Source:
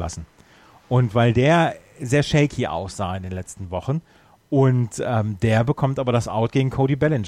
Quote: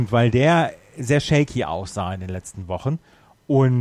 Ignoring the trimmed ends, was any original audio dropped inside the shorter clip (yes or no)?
no